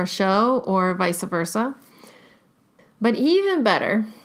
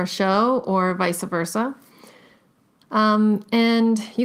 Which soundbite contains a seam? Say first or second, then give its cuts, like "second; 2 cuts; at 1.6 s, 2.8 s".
first; 1 cut; at 2.8 s